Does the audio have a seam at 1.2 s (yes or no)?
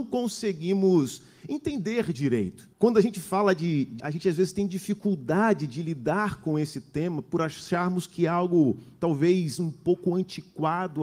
no